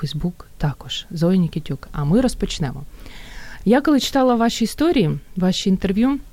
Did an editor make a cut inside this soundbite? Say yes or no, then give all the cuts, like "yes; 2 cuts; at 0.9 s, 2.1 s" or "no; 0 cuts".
no; 0 cuts